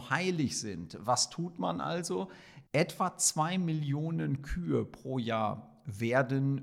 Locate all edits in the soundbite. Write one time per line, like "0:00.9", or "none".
0:02.7